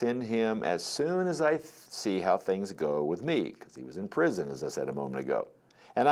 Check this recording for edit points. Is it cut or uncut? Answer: uncut